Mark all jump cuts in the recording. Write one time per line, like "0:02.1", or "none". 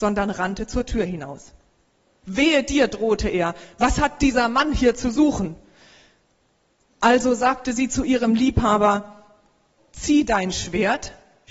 0:02.2
0:06.9
0:09.8